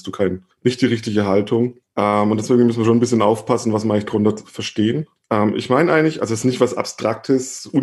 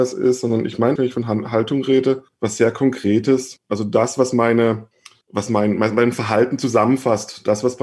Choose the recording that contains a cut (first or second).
second